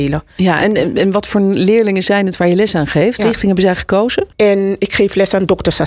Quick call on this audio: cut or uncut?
cut